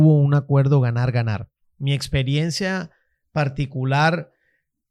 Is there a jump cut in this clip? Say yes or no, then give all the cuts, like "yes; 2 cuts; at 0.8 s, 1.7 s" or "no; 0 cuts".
yes; 1 cut; at 1.6 s